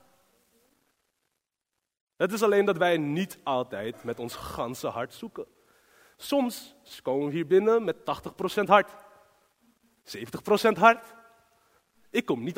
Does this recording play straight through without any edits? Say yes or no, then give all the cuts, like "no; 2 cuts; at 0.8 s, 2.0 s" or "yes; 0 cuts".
yes; 0 cuts